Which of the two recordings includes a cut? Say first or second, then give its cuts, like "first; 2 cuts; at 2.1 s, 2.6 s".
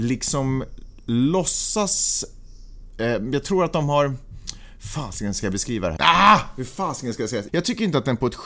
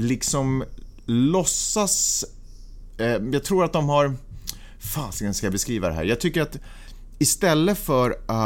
first; 2 cuts; at 6.0 s, 7.5 s